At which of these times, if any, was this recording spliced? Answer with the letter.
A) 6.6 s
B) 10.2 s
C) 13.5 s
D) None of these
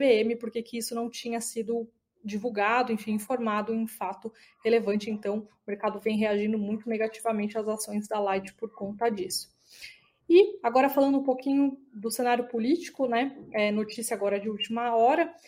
D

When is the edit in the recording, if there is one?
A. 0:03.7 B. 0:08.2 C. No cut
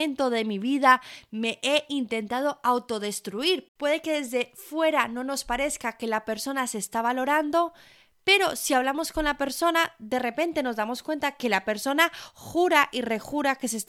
A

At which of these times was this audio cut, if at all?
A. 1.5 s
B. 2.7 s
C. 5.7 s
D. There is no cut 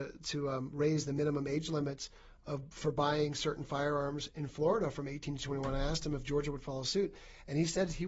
D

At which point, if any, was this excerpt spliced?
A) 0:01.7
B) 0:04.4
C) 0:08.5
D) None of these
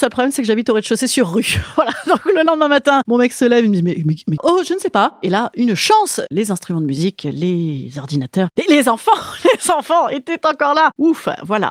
B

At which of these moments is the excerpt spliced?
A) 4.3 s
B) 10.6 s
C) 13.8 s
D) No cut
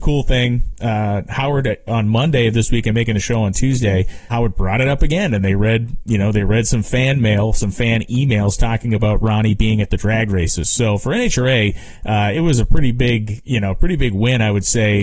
A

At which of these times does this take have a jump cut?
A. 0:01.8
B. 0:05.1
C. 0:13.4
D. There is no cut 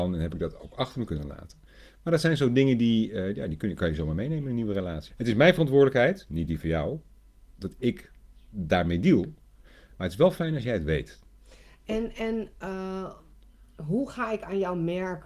B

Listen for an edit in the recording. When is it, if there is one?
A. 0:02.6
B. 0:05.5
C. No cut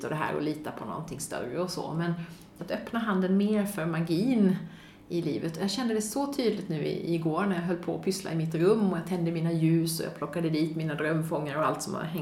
A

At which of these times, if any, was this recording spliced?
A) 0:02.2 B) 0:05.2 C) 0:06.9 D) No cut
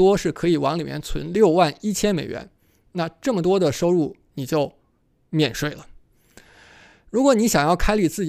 D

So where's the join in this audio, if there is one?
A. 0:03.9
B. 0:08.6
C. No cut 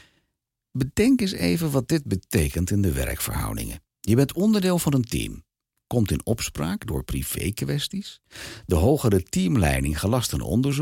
A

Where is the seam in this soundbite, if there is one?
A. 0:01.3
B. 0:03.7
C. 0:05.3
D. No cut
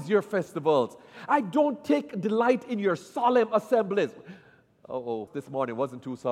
C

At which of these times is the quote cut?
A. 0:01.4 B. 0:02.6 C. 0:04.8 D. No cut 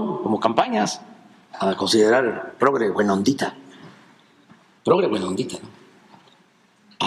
A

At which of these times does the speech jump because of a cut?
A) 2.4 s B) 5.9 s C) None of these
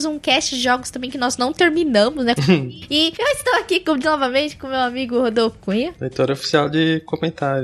A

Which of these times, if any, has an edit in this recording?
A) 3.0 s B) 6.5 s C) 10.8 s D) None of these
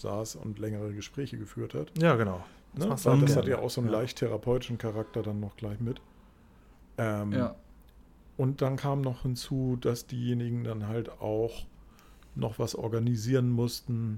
D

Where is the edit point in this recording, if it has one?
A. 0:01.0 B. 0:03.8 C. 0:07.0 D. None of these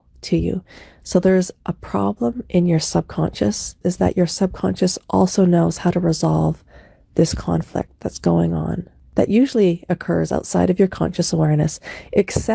B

